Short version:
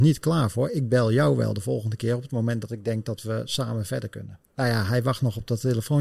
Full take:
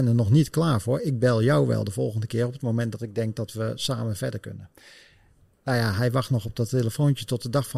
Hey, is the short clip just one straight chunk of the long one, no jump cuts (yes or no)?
no